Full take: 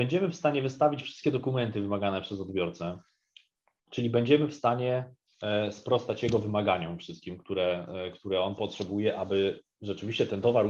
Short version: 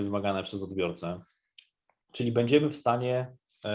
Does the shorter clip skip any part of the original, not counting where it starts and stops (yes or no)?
no